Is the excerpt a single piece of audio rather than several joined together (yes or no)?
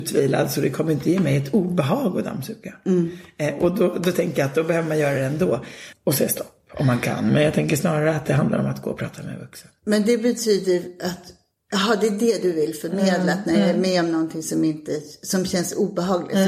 no